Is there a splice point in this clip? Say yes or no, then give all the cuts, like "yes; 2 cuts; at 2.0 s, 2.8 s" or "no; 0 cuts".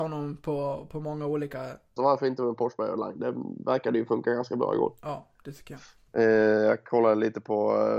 yes; 1 cut; at 2.0 s